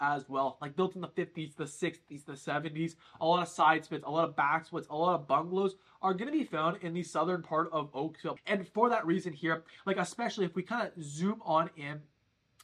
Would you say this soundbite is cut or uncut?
cut